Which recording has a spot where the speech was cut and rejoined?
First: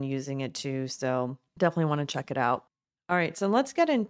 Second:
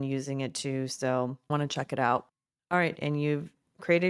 second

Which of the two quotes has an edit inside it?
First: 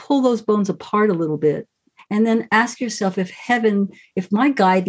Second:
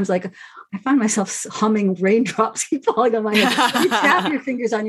first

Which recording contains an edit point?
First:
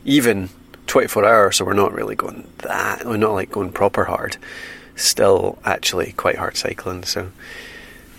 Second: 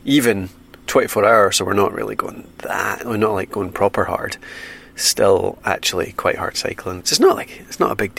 second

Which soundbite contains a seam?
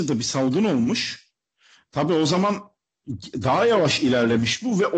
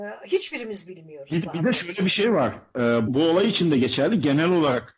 second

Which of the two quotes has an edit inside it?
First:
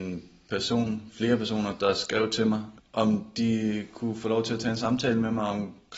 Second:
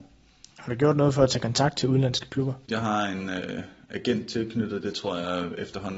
second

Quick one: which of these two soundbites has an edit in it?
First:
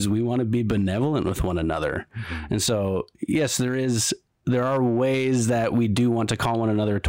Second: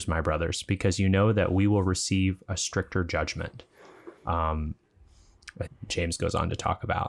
second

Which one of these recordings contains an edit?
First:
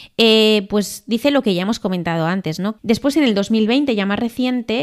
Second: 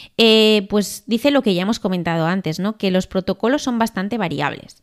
first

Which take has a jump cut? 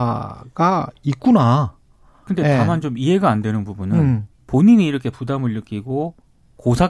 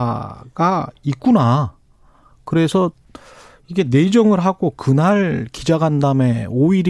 first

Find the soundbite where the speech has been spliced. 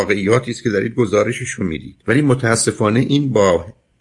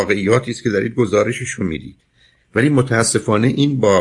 first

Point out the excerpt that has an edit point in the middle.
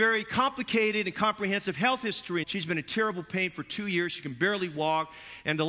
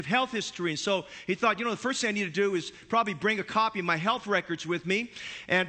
first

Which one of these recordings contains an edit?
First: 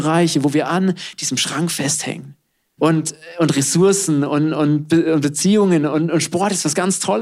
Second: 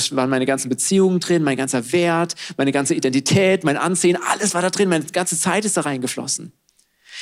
first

